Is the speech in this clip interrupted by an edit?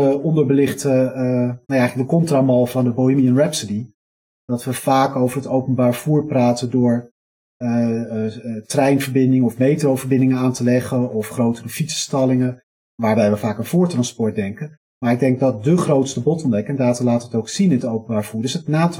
no; 0 cuts

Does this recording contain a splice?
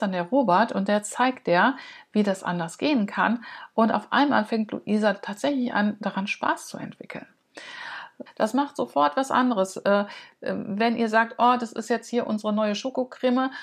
yes; 1 cut; at 8.3 s

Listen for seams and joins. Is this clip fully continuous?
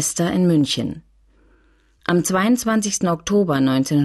yes; 0 cuts

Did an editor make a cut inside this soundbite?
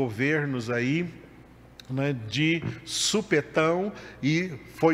no; 0 cuts

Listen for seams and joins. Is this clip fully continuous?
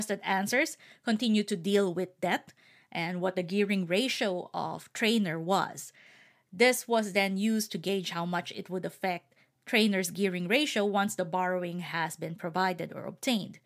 yes; 0 cuts

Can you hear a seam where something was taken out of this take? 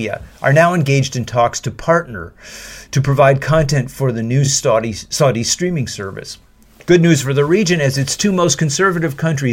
no; 0 cuts

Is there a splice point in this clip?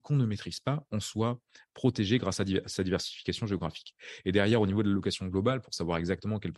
no; 0 cuts

